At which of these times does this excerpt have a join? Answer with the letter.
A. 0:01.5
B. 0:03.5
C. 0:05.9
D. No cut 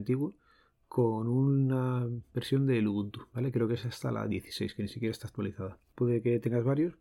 C